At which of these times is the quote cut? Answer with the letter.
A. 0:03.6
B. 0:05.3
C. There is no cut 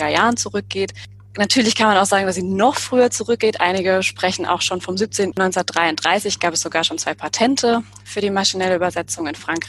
B